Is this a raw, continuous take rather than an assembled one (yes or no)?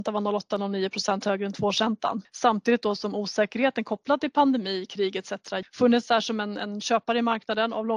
no